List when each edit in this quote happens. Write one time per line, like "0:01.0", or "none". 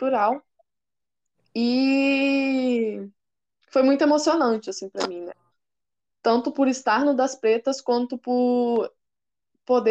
none